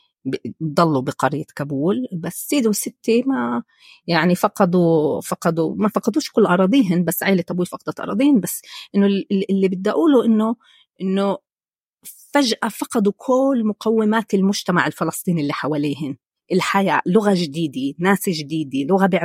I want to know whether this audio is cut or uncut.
uncut